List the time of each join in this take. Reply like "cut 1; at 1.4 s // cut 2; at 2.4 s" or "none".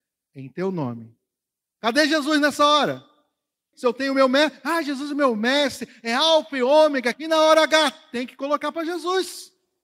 cut 1; at 1.7 s // cut 2; at 3.7 s // cut 3; at 7.1 s